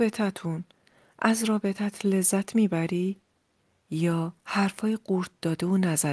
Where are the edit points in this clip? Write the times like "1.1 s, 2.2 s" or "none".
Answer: 4.4 s